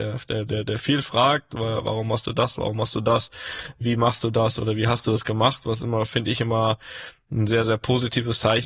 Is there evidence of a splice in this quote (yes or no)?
no